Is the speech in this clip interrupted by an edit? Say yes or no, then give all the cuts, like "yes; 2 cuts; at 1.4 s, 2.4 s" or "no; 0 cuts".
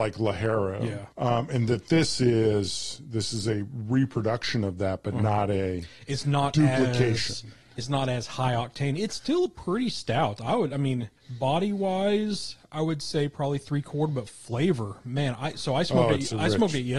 yes; 2 cuts; at 1.1 s, 11.2 s